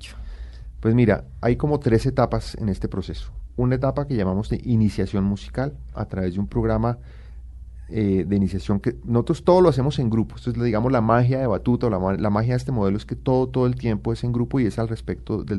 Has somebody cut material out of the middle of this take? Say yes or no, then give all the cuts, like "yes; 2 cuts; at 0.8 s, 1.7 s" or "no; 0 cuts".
no; 0 cuts